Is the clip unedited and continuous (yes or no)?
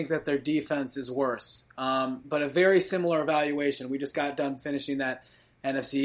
yes